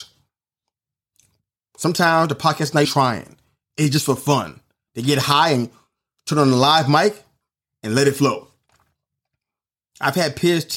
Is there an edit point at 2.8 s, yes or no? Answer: yes